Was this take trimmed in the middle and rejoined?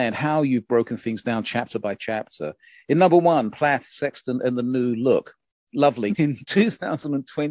yes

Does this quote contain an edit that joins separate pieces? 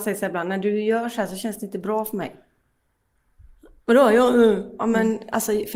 no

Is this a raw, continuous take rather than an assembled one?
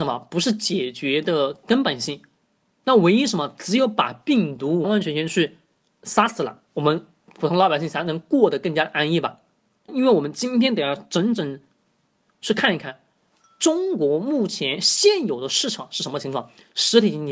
no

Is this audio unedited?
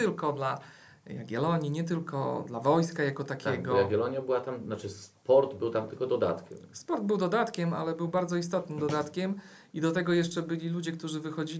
yes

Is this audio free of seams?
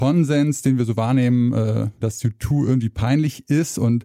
no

